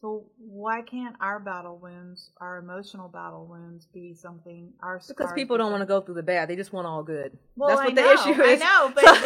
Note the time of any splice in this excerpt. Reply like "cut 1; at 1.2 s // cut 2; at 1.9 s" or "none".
none